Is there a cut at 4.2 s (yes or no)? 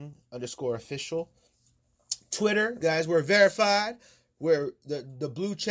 no